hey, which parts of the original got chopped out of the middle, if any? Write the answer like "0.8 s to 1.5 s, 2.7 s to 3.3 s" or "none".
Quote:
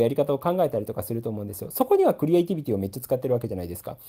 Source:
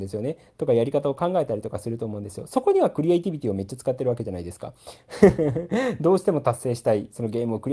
none